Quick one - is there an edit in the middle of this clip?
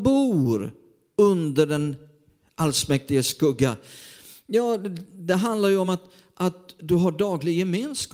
no; 0 cuts

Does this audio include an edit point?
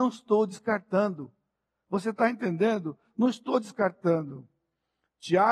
no; 0 cuts

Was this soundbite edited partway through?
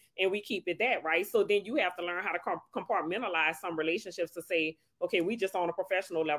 no; 0 cuts

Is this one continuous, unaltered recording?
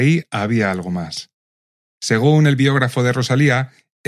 no; 1 cut; at 1.9 s

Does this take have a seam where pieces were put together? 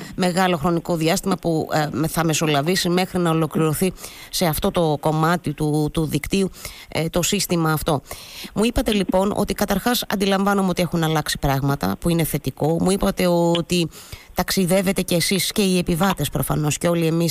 no; 0 cuts

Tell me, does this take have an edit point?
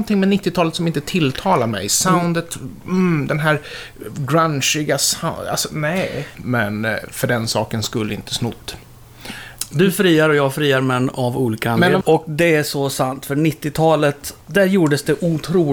yes; 3 cuts; at 6.3 s, 12.0 s, 14.4 s

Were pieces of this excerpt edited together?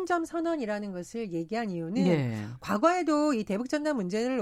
no; 0 cuts

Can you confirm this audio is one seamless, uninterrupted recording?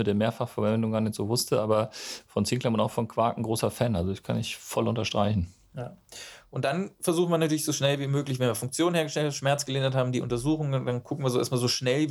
yes; 0 cuts

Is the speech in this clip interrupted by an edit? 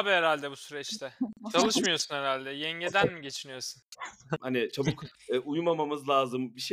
yes; 1 cut; at 4.4 s

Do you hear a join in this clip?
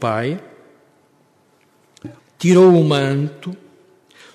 yes; 1 cut; at 2.2 s

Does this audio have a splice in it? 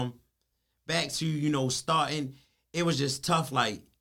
no; 0 cuts

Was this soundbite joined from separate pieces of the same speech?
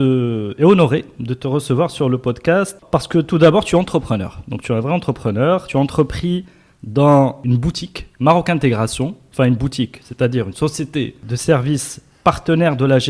no; 0 cuts

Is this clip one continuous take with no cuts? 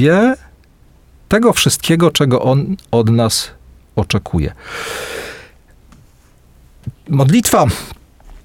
yes; 0 cuts

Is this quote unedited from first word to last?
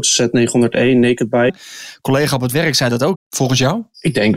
no; 2 cuts; at 1.5 s, 3.1 s

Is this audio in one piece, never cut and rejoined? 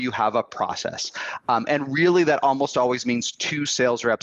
yes; 0 cuts

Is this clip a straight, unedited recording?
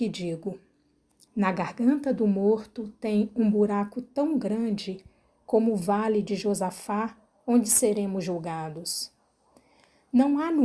no; 1 cut; at 1.3 s

